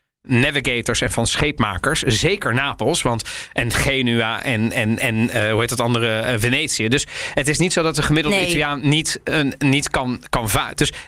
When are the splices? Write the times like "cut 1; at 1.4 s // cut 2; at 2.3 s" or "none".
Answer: none